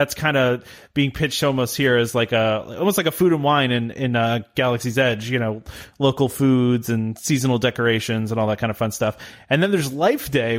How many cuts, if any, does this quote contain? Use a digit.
0